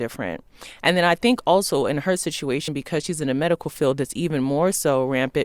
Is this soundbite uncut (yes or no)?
yes